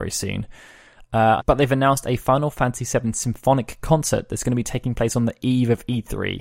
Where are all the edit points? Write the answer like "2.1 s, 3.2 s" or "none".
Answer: 1.4 s